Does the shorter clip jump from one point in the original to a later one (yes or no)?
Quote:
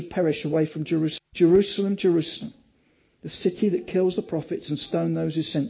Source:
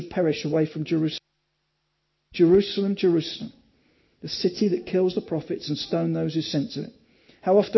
yes